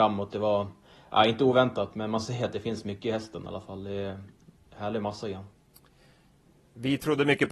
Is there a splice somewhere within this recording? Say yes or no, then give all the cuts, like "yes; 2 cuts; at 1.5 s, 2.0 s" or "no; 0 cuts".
no; 0 cuts